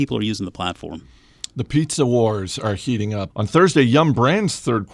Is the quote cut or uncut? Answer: cut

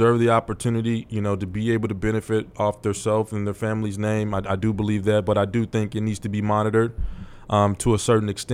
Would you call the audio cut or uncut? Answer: uncut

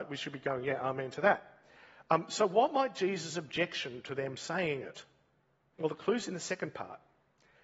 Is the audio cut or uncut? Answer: cut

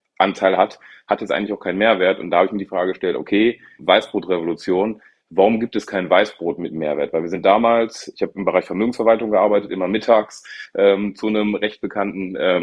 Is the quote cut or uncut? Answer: cut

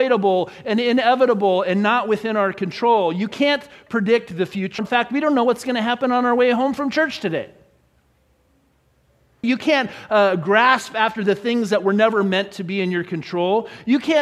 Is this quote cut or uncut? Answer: cut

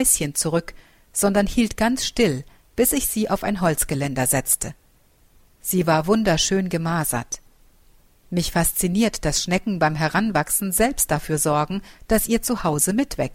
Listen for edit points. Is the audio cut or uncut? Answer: cut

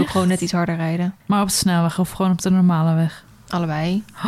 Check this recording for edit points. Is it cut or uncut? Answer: cut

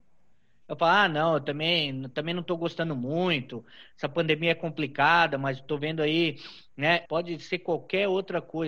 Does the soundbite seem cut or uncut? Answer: cut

